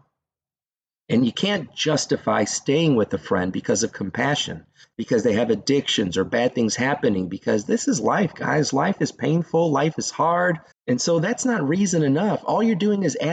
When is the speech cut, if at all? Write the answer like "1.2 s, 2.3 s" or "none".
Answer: 10.7 s